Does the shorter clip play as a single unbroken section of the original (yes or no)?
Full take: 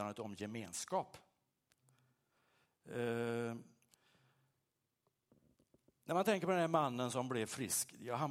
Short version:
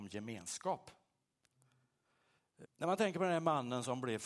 no